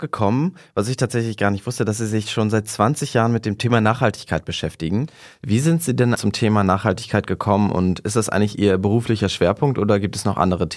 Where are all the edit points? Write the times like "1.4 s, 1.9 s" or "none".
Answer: 6.1 s